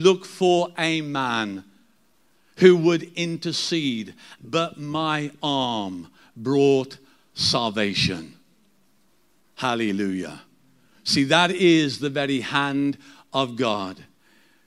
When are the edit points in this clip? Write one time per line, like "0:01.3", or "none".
0:04.4